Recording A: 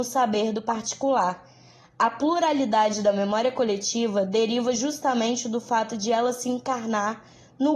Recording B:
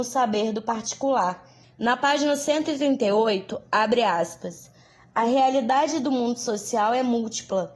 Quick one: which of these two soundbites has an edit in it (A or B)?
B